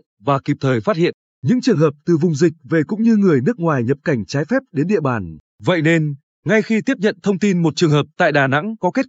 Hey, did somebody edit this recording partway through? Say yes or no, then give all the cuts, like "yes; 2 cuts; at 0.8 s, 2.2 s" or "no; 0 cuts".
yes; 1 cut; at 5.5 s